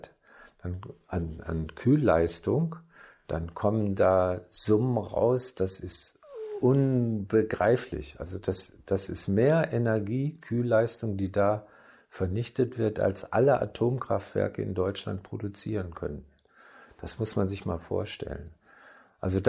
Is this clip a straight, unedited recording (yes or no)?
yes